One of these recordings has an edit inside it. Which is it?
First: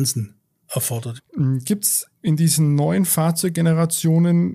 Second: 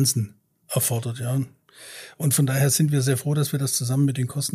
first; 1 cut; at 1.2 s

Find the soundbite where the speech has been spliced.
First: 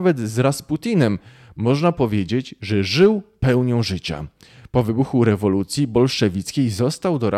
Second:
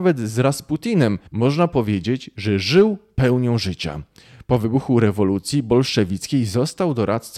second; 1 cut; at 1.3 s

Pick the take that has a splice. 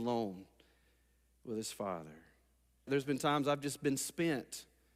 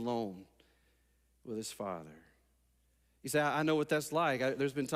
first; 1 cut; at 2.9 s

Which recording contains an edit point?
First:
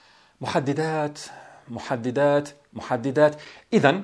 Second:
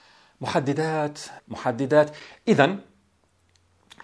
second; 1 cut; at 1.4 s

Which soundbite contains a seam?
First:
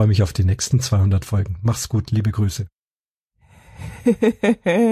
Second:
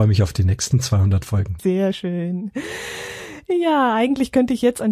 second; 1 cut; at 1.6 s

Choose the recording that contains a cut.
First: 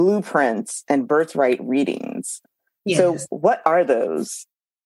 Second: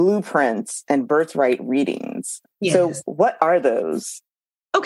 second; 1 cut; at 2.5 s

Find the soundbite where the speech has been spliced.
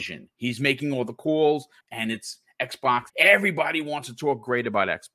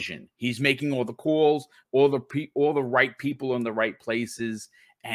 first; 2 cuts; at 1.8 s, 3.1 s

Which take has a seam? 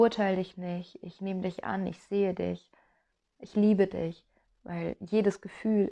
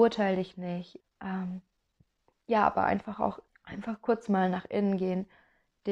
second; 2 cuts; at 1.0 s, 3.5 s

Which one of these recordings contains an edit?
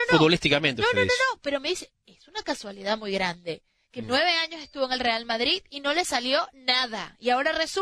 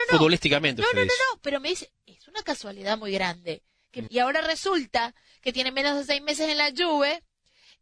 second; 1 cut; at 4.1 s

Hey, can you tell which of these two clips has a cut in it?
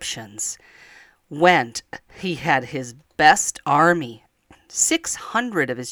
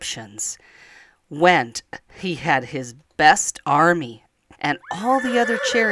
second; 1 cut; at 4.5 s

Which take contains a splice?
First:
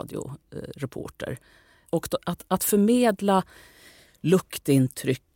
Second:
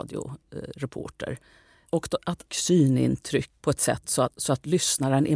second; 2 cuts; at 2.5 s, 3.6 s

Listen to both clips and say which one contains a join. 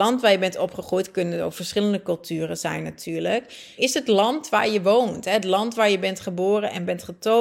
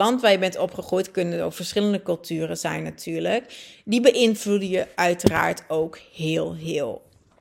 first; 1 cut; at 3.8 s

